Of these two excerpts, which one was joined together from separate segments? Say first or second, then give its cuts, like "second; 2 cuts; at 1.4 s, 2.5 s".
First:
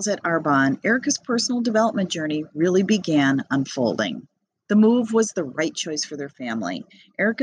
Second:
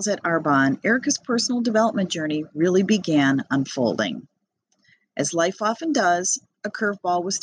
first; 1 cut; at 4.6 s